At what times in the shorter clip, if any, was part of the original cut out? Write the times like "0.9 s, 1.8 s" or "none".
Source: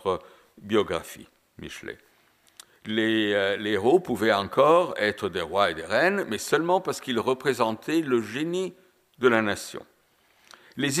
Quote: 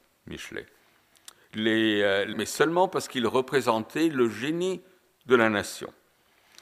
2.3 s